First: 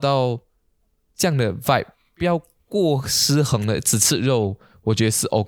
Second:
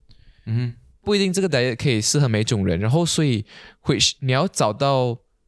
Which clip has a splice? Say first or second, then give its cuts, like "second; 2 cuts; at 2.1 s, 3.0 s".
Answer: first; 1 cut; at 1.1 s